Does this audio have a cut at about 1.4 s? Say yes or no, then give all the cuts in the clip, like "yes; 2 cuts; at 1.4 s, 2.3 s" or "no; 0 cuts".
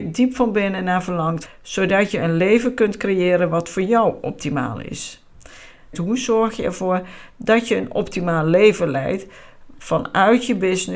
yes; 2 cuts; at 1.4 s, 5.9 s